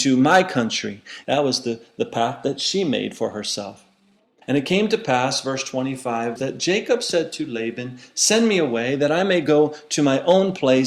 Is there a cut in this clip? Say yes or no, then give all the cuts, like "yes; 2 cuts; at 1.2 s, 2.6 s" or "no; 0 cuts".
yes; 3 cuts; at 1.2 s, 4.4 s, 6.4 s